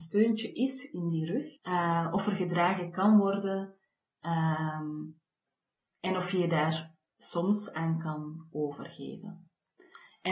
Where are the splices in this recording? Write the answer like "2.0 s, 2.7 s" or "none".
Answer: 1.6 s